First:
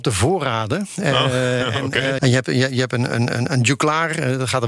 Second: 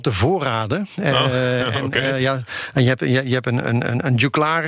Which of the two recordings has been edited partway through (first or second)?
first